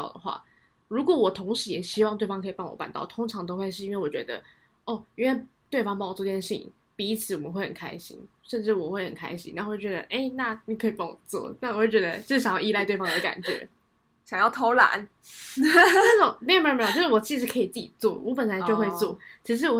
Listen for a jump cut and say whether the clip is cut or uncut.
uncut